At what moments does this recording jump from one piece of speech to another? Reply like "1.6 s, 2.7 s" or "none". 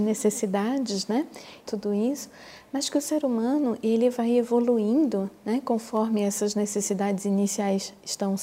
1.6 s